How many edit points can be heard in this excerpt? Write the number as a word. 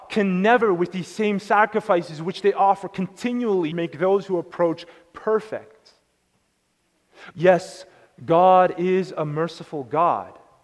two